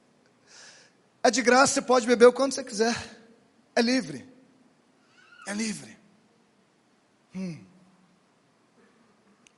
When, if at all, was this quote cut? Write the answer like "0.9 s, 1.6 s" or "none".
none